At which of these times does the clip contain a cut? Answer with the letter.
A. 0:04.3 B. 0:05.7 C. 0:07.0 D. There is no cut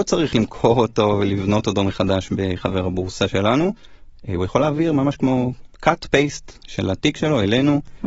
B